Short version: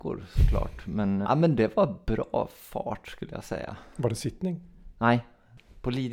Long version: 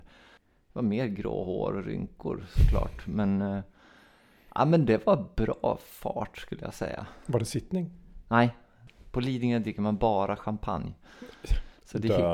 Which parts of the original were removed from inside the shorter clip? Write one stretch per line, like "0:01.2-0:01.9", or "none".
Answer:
0:03.4-0:04.5

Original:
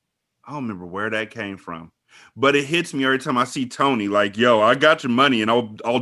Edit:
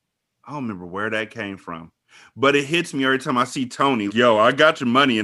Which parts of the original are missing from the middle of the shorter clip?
0:04.1-0:04.3

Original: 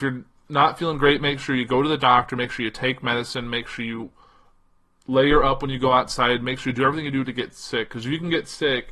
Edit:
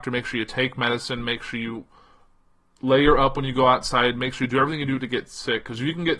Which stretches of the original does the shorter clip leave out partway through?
none

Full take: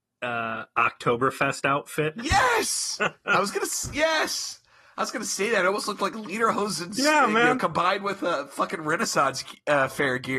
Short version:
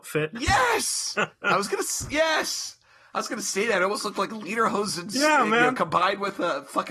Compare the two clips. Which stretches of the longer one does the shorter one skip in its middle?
none

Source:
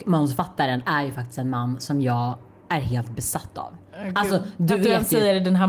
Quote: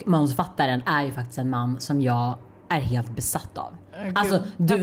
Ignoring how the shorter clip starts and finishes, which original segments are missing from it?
none

